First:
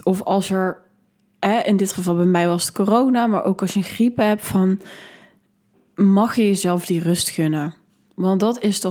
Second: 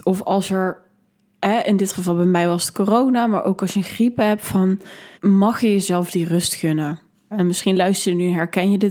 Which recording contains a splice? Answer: second; 2 cuts; at 5.1 s, 7.3 s

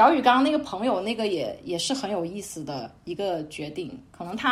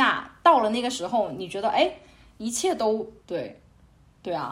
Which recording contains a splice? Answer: second; 1 cut; at 3.2 s

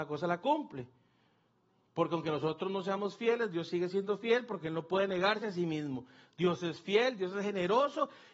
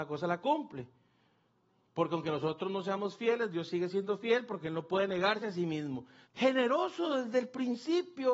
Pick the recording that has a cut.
second; 1 cut; at 6.2 s

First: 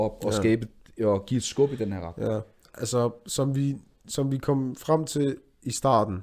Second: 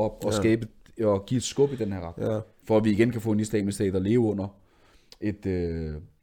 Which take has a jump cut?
second; 1 cut; at 2.6 s

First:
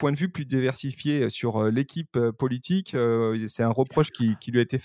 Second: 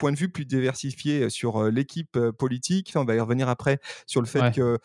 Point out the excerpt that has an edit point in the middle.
second; 1 cut; at 2.9 s

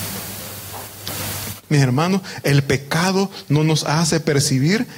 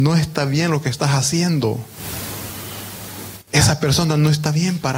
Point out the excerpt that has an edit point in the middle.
first; 1 cut; at 1.6 s

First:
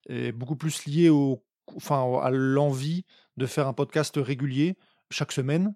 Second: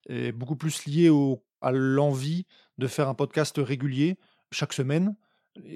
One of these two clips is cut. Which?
second; 1 cut; at 1.6 s

